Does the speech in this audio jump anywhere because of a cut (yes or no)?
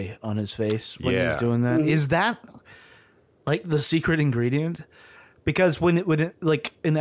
no